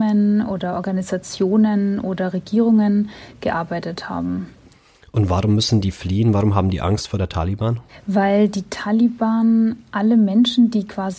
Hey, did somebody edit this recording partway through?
no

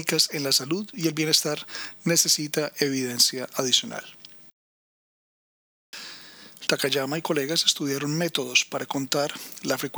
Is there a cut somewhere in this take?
yes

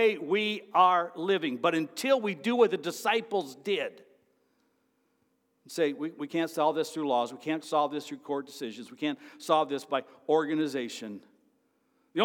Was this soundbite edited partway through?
no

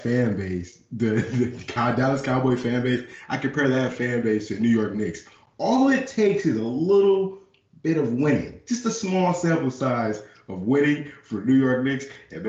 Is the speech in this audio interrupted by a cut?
no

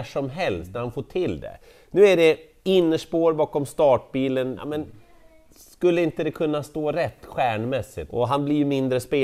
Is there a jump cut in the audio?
yes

